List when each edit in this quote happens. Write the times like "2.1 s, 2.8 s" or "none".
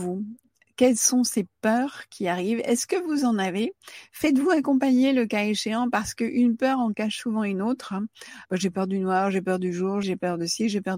8.5 s, 10.0 s

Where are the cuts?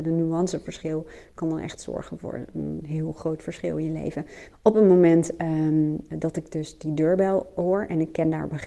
4.5 s

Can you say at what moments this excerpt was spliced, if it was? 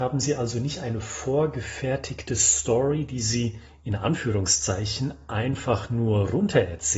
none

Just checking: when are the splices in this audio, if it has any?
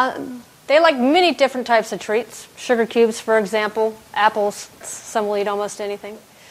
4.8 s

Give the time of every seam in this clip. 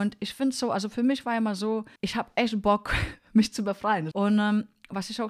2.0 s, 4.1 s

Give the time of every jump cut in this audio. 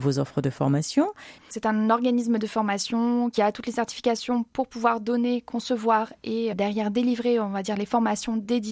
1.4 s

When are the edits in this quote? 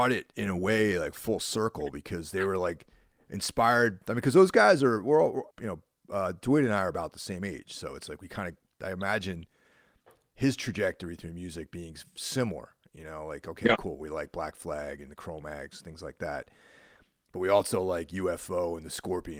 5.5 s

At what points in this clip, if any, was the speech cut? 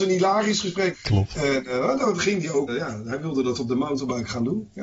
0.9 s, 2.7 s

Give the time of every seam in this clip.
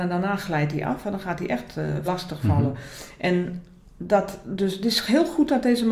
2.0 s

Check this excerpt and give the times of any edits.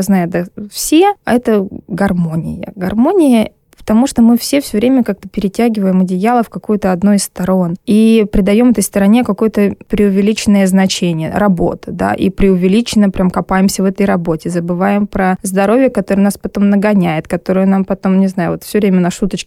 none

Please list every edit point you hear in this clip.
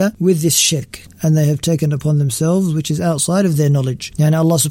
1.1 s

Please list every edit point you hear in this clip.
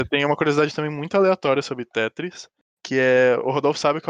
none

